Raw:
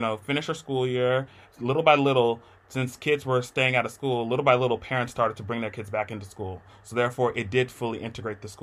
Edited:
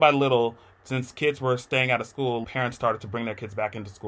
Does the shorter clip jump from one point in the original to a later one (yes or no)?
yes